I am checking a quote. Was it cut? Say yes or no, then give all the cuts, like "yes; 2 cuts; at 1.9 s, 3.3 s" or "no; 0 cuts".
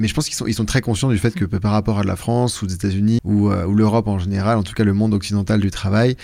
yes; 1 cut; at 3.2 s